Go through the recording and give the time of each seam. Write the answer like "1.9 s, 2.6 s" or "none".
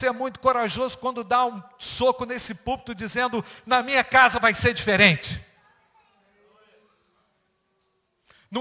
none